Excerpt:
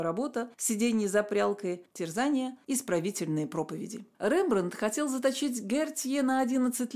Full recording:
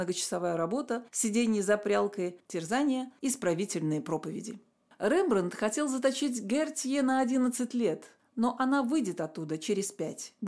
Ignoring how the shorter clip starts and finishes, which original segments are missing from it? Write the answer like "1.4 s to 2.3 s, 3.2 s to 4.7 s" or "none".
4.7 s to 4.9 s